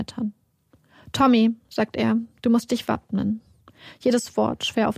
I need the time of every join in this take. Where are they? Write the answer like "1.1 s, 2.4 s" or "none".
none